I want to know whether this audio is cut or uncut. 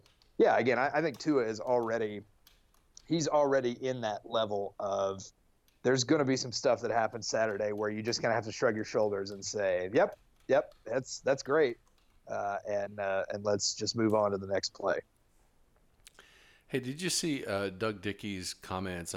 uncut